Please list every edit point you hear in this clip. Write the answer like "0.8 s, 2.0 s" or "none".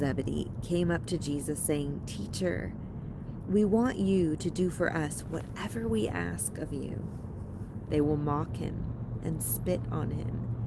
7.9 s